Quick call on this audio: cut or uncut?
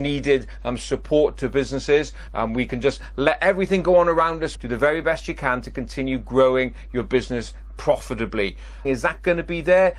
cut